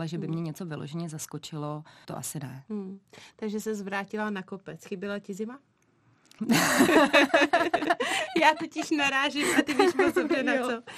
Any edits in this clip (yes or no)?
yes